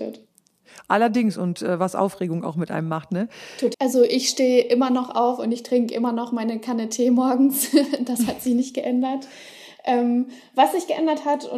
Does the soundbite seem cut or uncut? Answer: cut